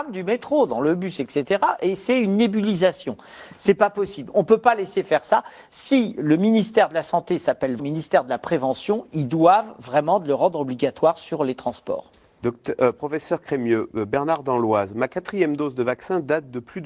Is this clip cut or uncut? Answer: cut